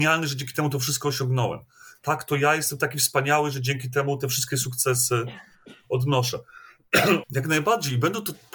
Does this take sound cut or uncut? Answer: cut